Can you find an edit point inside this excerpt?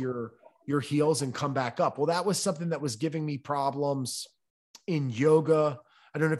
no; 0 cuts

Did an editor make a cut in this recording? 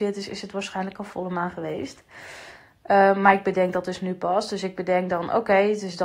no; 0 cuts

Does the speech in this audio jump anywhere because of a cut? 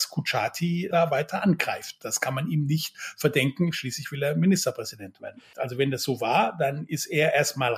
yes; 1 cut; at 5.5 s

